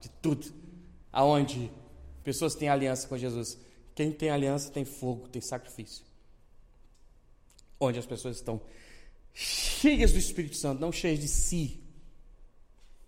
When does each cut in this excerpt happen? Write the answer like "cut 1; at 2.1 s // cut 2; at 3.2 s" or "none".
cut 1; at 2.2 s